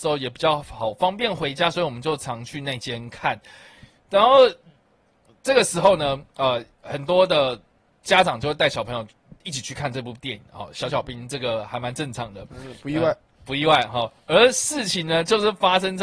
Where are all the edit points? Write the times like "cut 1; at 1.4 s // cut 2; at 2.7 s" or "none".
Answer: none